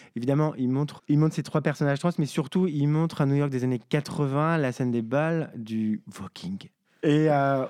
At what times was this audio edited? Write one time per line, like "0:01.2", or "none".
0:01.0